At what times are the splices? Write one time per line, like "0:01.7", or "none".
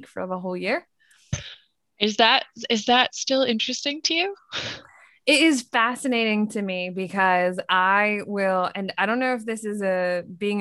none